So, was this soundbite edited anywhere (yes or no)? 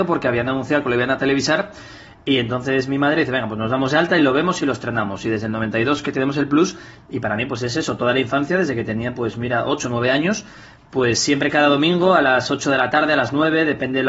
no